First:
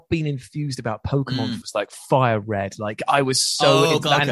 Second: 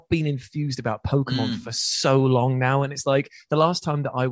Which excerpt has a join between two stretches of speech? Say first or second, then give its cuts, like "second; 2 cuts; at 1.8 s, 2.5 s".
first; 1 cut; at 1.6 s